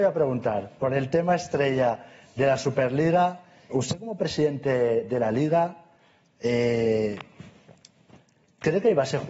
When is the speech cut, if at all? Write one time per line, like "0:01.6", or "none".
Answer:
0:03.7